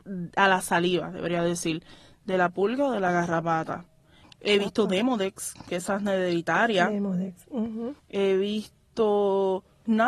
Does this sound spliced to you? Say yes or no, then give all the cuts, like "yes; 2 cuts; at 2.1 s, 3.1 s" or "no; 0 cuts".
yes; 2 cuts; at 4.2 s, 8.0 s